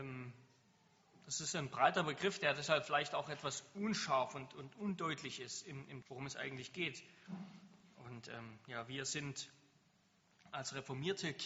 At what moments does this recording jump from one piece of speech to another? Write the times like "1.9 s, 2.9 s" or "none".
6.0 s